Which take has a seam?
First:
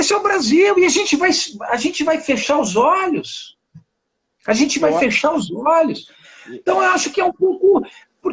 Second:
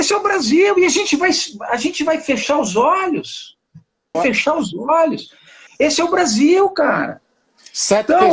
second; 2 cuts; at 4.1 s, 5.7 s

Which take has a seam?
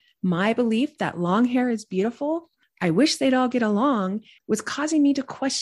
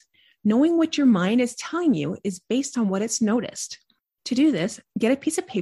first; 1 cut; at 4.4 s

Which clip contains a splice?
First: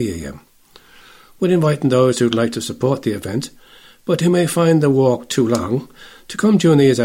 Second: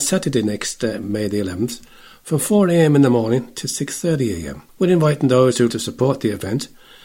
second; 2 cuts; at 4.7 s, 5.7 s

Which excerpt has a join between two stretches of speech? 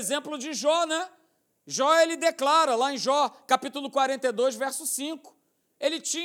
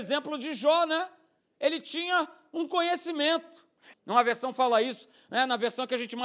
second; 2 cuts; at 1.4 s, 3.9 s

